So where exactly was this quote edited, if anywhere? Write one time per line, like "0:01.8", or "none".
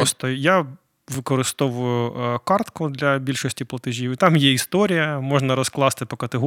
none